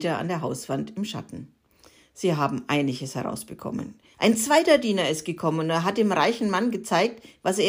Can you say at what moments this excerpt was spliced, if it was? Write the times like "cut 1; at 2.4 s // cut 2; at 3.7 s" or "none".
cut 1; at 4.1 s

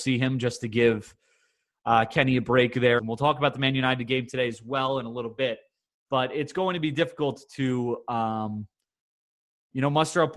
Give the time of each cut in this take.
cut 1; at 3.0 s

